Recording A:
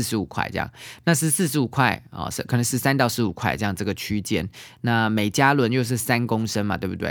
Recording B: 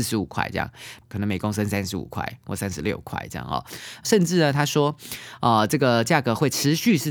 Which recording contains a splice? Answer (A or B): B